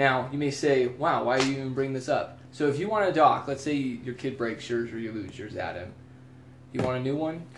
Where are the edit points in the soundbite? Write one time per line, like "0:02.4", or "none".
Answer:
none